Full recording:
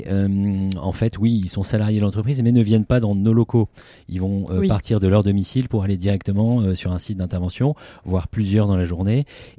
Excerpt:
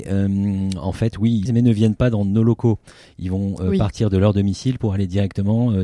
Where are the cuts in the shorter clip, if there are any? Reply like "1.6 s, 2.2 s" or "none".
1.5 s